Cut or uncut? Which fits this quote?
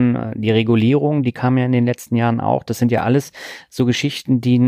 uncut